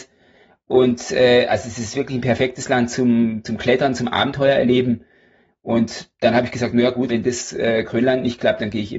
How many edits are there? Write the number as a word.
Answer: one